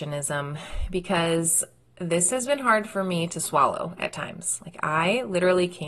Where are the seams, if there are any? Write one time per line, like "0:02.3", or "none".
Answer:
none